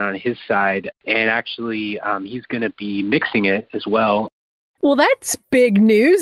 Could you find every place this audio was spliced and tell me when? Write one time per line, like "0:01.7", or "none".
0:00.9